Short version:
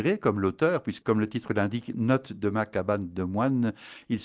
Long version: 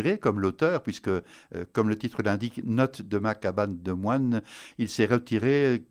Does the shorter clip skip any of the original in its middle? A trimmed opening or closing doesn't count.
yes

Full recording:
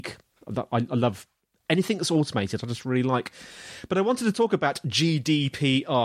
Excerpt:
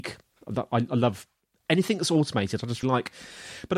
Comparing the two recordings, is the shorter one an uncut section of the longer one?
no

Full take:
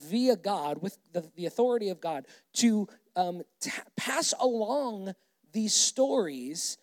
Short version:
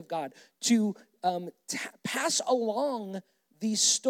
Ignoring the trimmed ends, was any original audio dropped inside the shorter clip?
no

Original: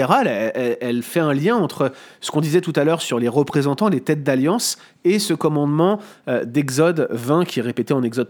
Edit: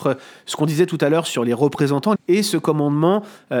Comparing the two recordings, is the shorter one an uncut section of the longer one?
no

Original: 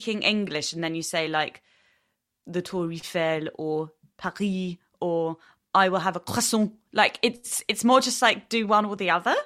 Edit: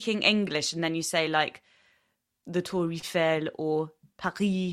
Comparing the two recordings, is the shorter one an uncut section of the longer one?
yes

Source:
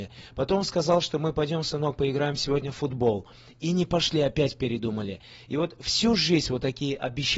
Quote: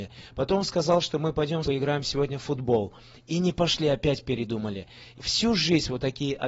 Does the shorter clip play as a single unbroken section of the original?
no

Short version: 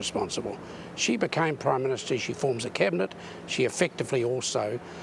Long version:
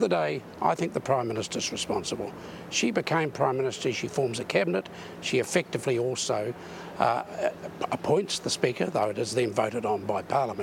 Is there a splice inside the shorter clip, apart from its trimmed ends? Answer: no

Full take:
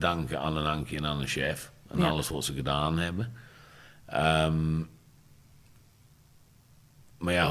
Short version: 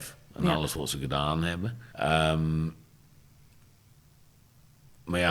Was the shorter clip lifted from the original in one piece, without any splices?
no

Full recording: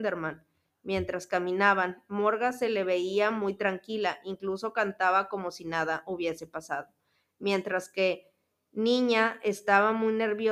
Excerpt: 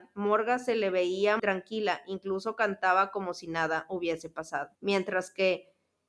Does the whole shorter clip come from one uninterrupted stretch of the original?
no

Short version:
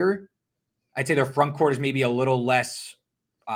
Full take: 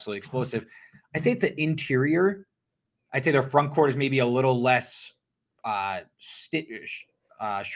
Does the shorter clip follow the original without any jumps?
yes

